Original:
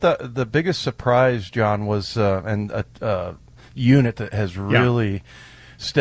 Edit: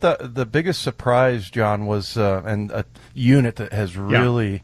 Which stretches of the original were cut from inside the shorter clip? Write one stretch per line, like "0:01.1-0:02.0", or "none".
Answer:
0:03.0-0:03.6